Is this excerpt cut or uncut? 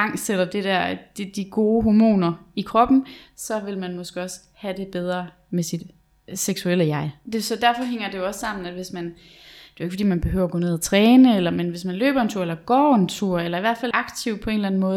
cut